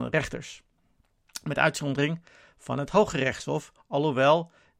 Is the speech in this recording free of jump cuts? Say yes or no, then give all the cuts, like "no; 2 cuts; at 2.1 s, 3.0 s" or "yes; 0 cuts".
yes; 0 cuts